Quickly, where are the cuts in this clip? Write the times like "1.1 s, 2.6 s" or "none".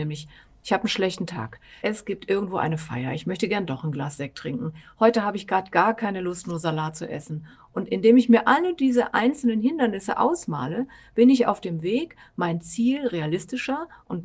1.8 s